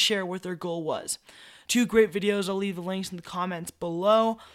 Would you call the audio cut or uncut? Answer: cut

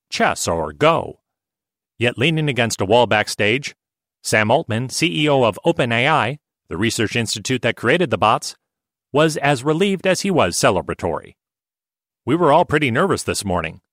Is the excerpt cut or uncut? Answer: uncut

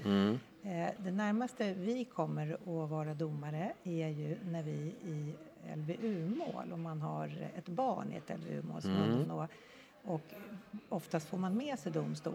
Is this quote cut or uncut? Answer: cut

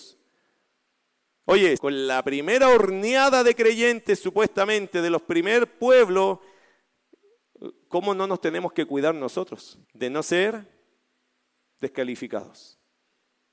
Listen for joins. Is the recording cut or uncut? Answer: cut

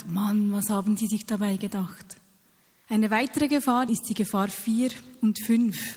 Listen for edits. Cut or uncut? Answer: cut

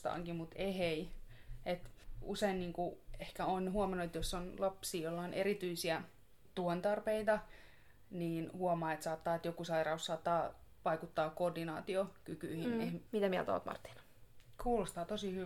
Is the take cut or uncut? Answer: cut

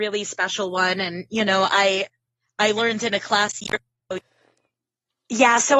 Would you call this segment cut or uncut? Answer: uncut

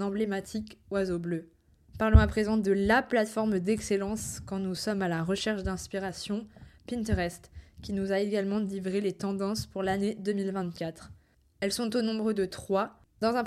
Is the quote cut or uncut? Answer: uncut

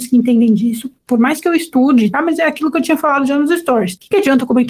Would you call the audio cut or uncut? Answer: cut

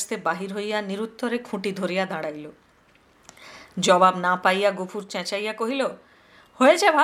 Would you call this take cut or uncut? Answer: uncut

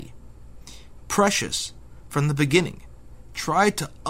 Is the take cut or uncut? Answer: uncut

